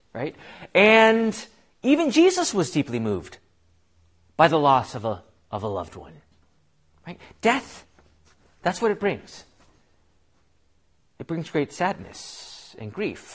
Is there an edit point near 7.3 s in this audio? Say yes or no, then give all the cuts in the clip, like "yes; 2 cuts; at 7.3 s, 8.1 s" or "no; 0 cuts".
no; 0 cuts